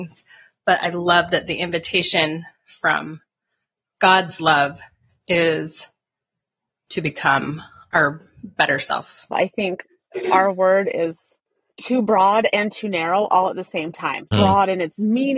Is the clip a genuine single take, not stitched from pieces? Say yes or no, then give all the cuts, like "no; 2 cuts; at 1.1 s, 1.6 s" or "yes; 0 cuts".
no; 3 cuts; at 9.3 s, 11.7 s, 14.3 s